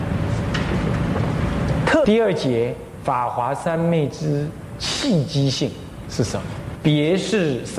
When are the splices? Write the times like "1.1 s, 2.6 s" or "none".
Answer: 2.0 s, 6.7 s